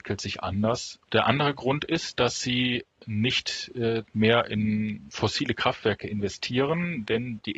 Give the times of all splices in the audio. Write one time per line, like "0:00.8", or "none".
0:01.0